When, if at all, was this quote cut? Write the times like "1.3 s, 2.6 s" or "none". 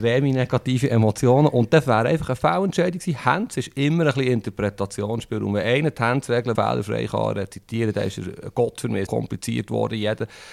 6.5 s, 9.1 s